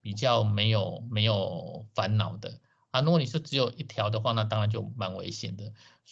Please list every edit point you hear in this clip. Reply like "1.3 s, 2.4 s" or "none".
none

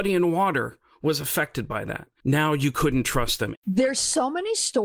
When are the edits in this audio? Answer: 2.2 s, 3.6 s

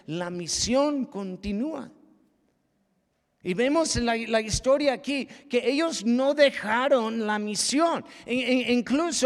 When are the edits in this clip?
none

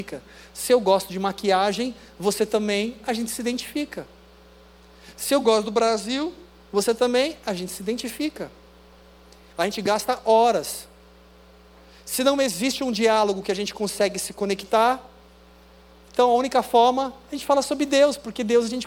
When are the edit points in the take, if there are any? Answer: none

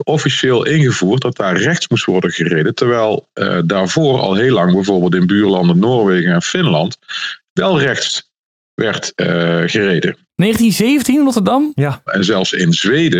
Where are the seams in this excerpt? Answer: 12.1 s

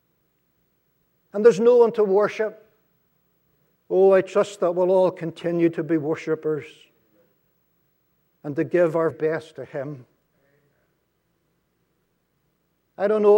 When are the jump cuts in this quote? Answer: 3.8 s, 9.1 s

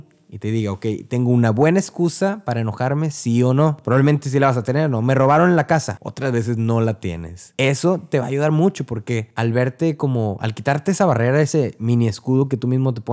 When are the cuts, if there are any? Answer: 6.0 s, 7.5 s

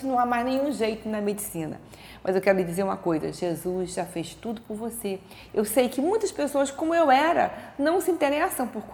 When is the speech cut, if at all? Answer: 5.5 s

